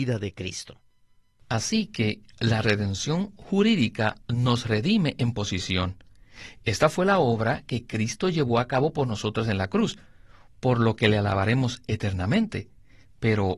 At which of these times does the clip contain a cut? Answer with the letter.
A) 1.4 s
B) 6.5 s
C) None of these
C